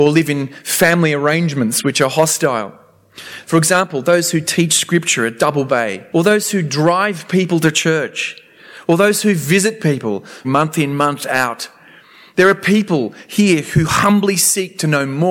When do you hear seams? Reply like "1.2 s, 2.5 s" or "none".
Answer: 3.4 s, 6.1 s, 10.4 s